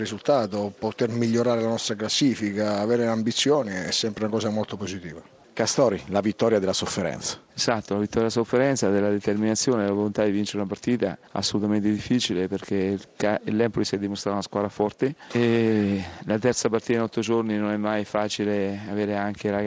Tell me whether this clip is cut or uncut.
uncut